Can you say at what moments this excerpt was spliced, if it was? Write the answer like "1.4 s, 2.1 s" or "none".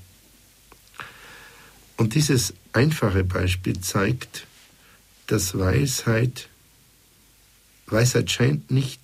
none